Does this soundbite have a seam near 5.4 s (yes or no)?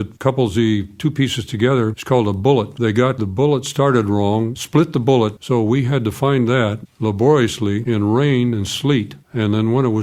yes